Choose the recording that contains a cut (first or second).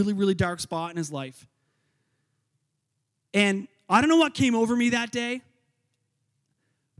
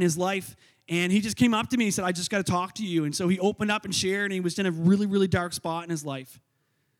second